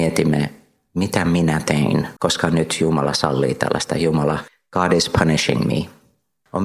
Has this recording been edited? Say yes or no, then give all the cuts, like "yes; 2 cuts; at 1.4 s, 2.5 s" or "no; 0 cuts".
yes; 1 cut; at 2.2 s